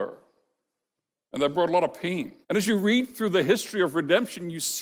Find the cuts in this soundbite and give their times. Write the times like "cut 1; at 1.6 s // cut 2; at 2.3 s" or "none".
cut 1; at 2.4 s